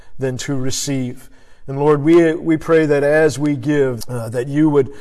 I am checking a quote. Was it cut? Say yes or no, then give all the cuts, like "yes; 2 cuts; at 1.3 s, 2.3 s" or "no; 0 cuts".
yes; 1 cut; at 4.0 s